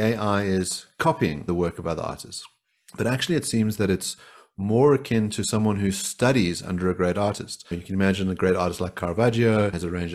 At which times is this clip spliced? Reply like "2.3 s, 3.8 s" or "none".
none